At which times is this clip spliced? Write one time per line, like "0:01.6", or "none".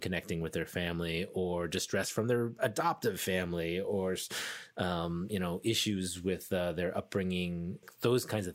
none